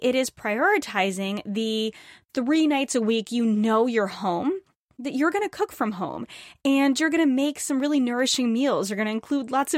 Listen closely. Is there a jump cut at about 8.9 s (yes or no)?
no